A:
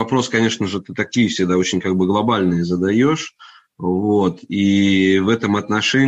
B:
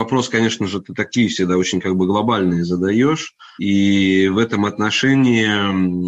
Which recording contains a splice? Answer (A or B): B